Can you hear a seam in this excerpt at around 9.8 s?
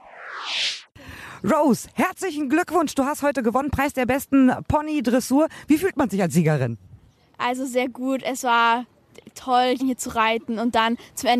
yes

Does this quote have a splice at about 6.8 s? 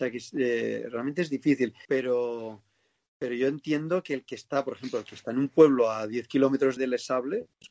yes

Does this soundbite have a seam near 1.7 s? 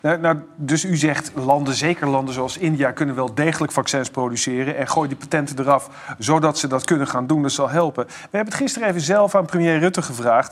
no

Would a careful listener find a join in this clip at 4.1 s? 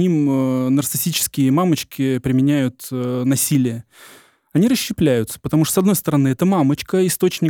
no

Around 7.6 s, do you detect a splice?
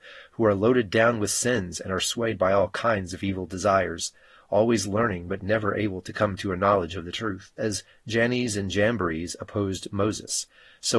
yes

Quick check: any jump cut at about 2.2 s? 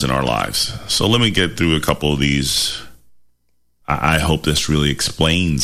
no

